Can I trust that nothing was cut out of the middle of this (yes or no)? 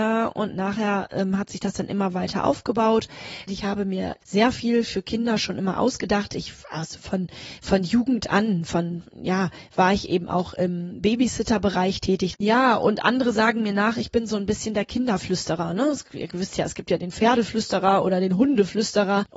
no